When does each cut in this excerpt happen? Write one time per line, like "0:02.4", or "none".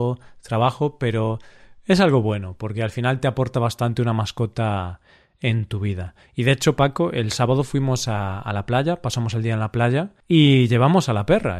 none

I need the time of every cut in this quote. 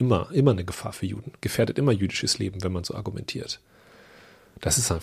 none

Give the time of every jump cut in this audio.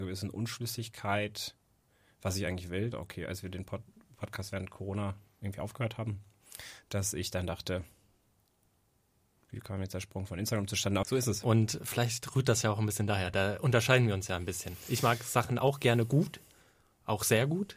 0:02.9
0:11.0

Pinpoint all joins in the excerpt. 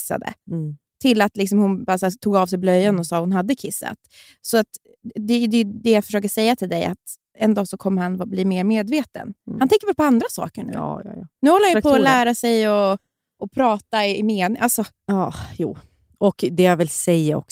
none

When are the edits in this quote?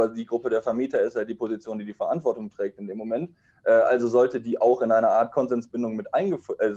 none

